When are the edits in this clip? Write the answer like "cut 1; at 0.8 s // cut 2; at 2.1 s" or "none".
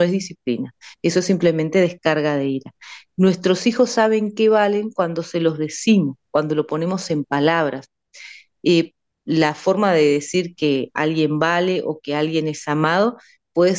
none